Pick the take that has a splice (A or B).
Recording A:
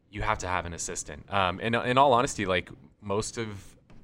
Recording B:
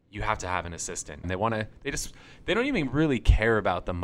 B